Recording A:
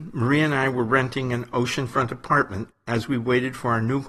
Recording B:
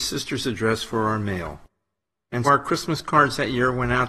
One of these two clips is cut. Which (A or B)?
B